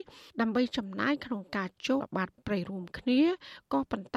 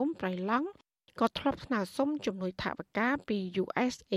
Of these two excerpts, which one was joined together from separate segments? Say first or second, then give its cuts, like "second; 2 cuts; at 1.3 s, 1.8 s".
first; 1 cut; at 2.0 s